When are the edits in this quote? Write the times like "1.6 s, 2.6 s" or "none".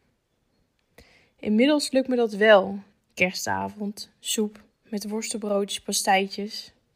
2.9 s